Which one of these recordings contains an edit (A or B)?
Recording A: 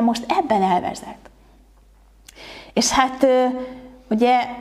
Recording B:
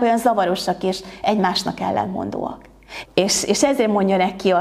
B